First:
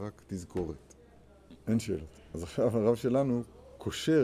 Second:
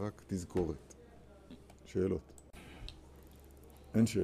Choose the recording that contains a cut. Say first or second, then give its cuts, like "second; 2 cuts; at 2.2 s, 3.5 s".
first; 1 cut; at 1.6 s